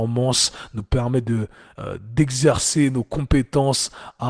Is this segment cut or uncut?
uncut